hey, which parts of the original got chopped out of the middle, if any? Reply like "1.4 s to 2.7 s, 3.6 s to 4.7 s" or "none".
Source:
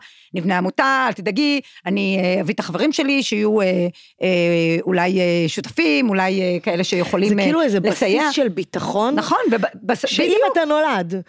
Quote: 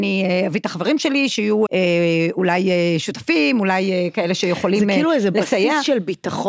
3.6 s to 4.2 s